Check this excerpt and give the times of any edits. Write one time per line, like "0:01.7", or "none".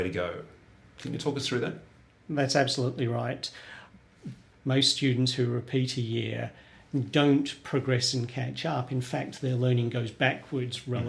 0:04.5